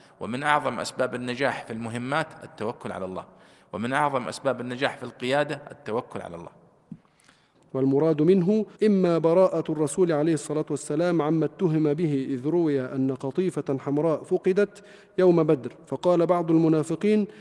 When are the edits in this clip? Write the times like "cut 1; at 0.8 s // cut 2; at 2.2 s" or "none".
cut 1; at 7.5 s // cut 2; at 8.7 s